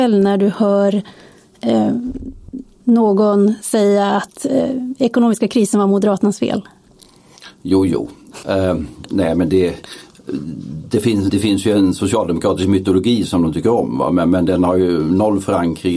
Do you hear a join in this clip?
yes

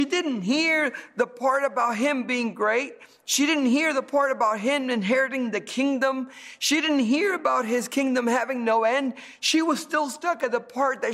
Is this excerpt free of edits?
yes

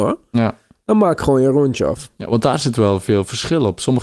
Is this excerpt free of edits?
yes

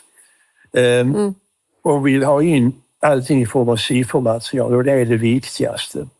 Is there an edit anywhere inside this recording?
no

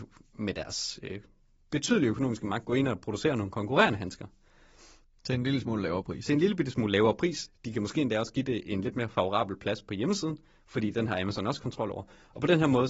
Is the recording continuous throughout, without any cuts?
yes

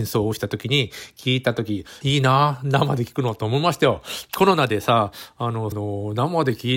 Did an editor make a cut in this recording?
yes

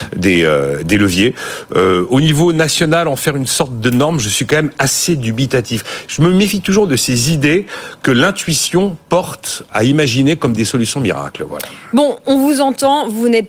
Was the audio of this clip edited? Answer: yes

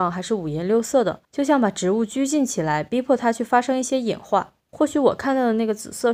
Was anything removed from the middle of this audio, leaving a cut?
yes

